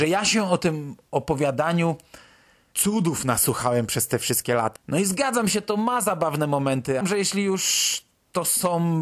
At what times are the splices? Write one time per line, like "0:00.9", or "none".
0:04.8
0:07.0